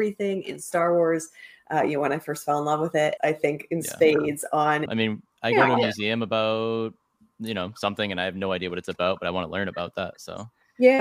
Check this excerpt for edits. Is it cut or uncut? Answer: cut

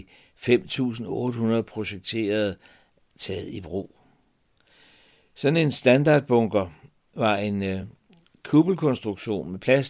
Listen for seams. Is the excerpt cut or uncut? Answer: uncut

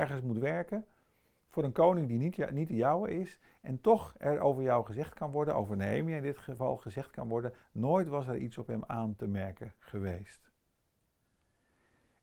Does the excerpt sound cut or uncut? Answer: uncut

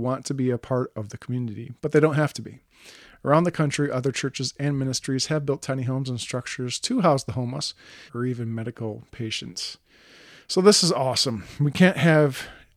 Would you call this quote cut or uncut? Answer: cut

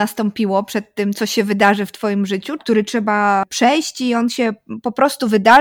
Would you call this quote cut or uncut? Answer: cut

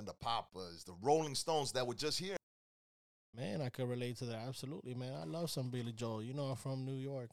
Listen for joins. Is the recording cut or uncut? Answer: uncut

